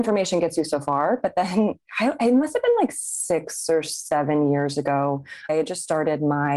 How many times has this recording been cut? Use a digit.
1